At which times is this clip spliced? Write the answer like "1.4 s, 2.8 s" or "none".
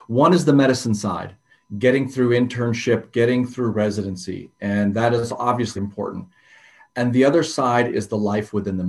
5.8 s